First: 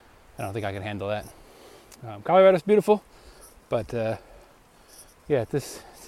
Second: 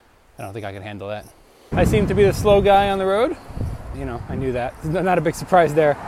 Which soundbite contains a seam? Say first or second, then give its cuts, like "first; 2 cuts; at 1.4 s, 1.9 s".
second; 2 cuts; at 1.7 s, 3.9 s